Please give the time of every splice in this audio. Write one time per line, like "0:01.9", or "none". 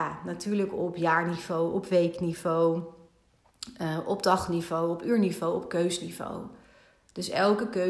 none

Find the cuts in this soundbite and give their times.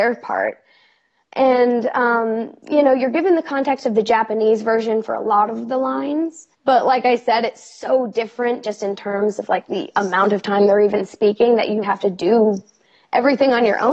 0:06.5
0:11.8

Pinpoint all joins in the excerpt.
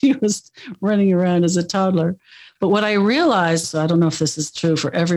0:02.5
0:03.6

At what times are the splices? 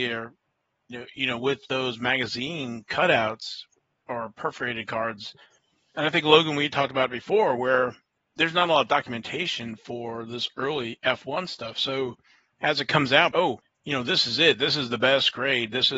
0:13.3

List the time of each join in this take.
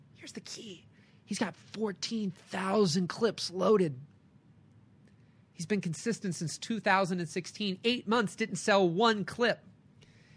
none

